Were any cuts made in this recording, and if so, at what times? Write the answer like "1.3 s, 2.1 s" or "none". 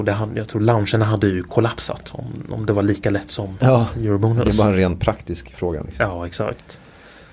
none